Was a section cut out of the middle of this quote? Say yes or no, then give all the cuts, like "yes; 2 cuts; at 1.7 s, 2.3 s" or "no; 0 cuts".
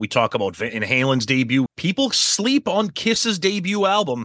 yes; 1 cut; at 1.7 s